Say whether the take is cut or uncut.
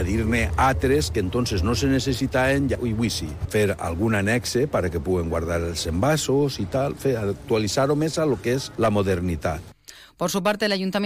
uncut